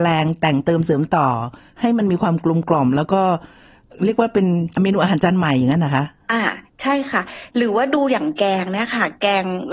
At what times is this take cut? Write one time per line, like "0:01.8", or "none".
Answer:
none